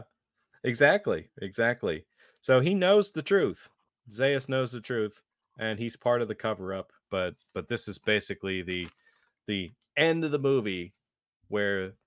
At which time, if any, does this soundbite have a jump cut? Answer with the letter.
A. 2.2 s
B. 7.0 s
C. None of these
B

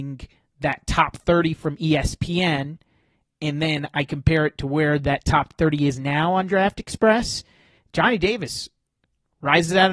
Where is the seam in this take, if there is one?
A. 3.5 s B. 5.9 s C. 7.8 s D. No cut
D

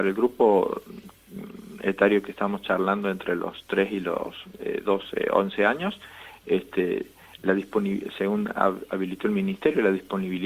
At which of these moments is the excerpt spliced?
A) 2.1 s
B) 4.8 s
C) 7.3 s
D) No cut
D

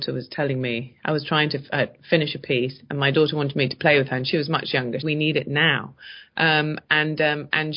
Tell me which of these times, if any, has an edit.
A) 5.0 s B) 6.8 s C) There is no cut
A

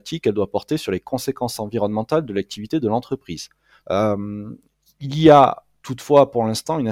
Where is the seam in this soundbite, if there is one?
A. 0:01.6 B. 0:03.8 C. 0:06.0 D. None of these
B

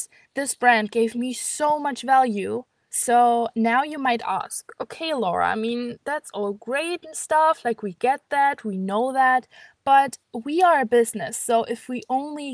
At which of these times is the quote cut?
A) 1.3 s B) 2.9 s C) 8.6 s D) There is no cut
B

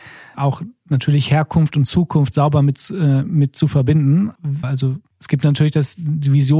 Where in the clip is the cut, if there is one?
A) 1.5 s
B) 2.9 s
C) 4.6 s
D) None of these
C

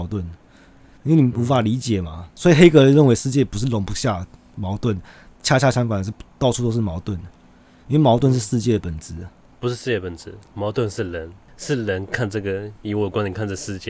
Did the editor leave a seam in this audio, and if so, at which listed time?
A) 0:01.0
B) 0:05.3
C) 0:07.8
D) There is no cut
A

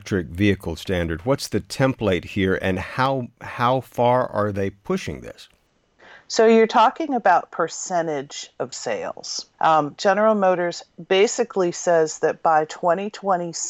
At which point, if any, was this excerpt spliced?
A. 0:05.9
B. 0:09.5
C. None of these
B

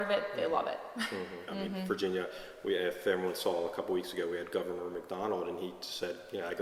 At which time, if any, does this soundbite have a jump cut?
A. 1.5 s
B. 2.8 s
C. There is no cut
A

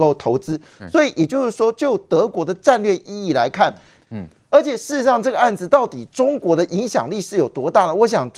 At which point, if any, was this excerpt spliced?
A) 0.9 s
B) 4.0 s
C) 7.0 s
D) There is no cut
B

